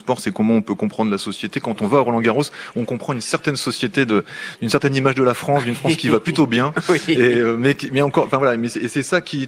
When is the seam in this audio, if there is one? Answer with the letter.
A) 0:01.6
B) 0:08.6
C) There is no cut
C